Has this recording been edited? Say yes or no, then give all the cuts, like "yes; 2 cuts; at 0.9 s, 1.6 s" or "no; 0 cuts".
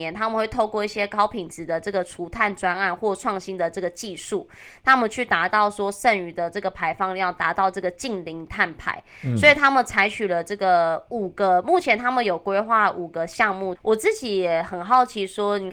yes; 1 cut; at 13.8 s